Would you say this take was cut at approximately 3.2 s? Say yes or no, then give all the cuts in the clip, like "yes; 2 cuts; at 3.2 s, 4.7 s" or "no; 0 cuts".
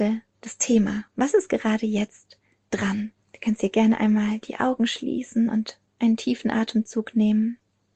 yes; 1 cut; at 3.2 s